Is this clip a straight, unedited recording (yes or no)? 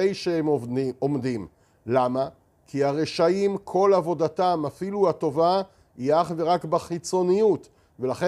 yes